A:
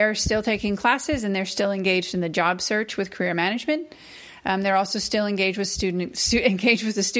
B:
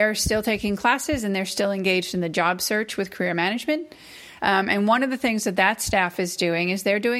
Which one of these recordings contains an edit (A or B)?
B